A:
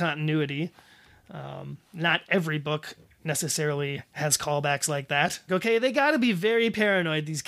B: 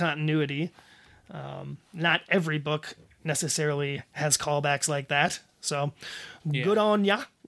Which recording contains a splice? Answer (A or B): A